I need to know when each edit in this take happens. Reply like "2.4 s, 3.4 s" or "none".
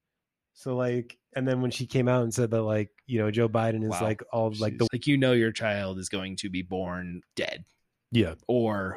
4.9 s, 7.2 s